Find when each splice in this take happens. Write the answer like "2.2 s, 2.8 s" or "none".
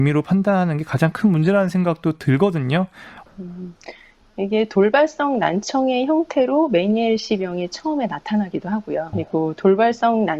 3.3 s, 9.1 s